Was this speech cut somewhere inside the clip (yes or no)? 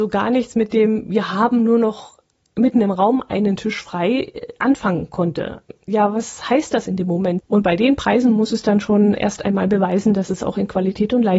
yes